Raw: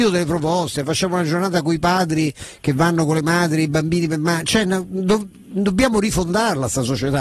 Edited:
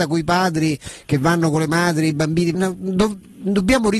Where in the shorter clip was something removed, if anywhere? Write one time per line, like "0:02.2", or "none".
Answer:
0:02.5